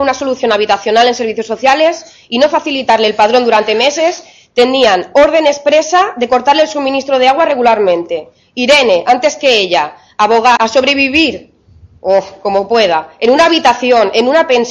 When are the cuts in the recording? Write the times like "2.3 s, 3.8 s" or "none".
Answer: 10.6 s